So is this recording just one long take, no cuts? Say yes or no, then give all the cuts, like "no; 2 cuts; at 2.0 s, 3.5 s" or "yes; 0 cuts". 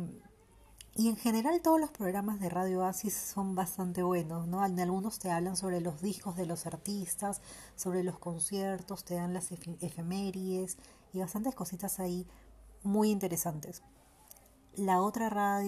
yes; 0 cuts